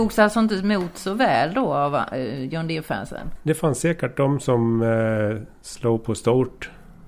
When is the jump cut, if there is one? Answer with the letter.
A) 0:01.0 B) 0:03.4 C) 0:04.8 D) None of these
B